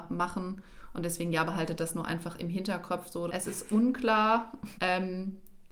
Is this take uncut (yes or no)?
no